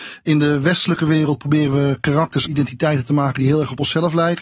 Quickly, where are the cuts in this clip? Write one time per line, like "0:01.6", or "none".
0:02.5